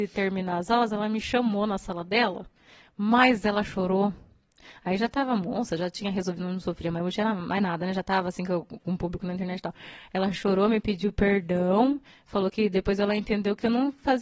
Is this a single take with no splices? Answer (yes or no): yes